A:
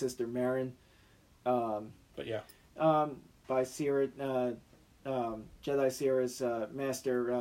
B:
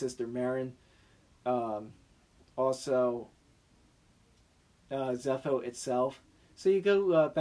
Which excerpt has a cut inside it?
A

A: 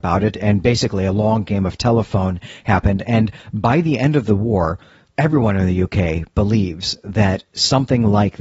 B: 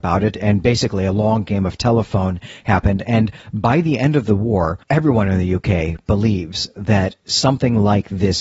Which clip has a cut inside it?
B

